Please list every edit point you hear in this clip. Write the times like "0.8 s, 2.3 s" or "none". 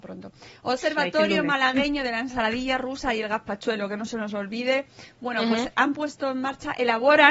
5.7 s